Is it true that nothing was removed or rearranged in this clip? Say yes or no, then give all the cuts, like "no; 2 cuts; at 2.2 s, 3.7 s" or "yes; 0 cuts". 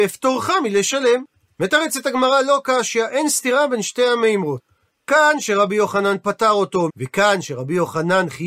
no; 2 cuts; at 1.5 s, 6.9 s